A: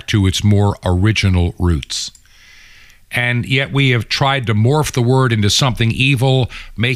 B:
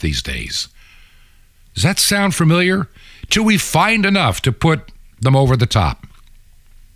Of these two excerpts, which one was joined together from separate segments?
B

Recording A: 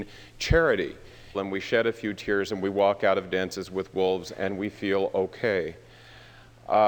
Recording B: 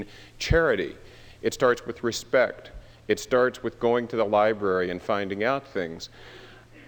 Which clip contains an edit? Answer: A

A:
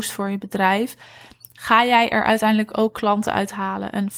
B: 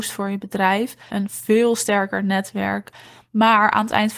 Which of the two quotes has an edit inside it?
B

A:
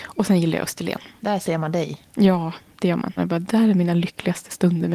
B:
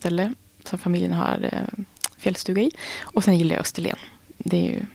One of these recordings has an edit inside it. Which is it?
A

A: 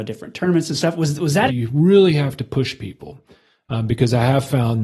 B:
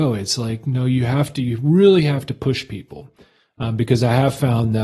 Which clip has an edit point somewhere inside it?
A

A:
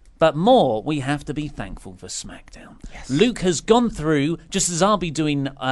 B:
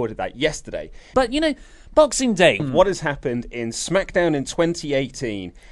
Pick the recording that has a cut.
B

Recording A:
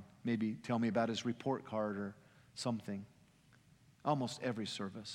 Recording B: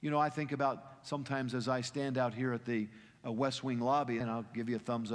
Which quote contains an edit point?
B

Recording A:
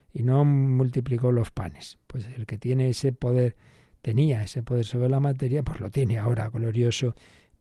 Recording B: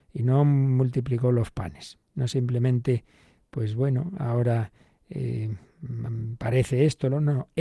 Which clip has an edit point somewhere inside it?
B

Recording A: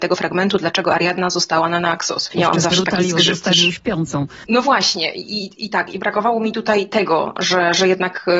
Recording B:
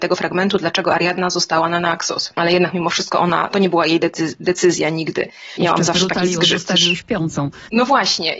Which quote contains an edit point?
A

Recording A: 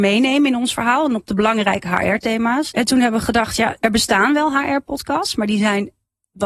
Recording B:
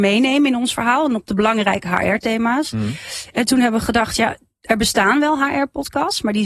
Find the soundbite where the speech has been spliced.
A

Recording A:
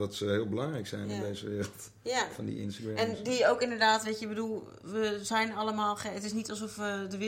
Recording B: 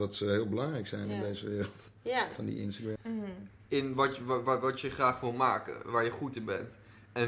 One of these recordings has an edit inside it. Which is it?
B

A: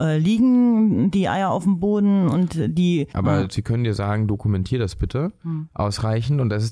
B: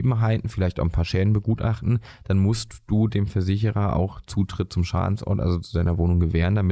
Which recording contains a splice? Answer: A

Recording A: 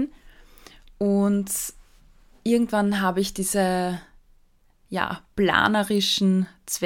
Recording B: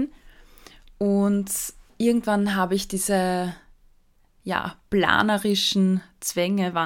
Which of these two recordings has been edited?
B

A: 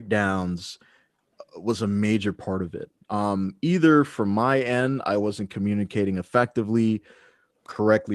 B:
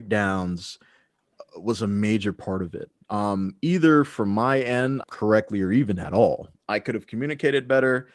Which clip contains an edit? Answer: B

